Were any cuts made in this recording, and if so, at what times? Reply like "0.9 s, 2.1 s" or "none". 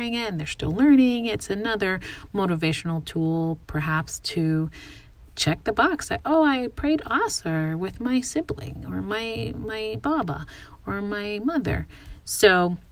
none